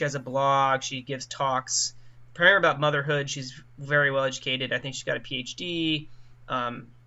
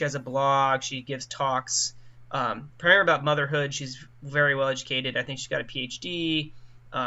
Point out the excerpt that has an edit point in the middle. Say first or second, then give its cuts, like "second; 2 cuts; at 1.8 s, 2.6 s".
first; 1 cut; at 2.3 s